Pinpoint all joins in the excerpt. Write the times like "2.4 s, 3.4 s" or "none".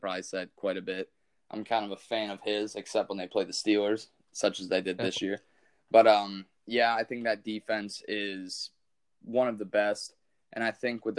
none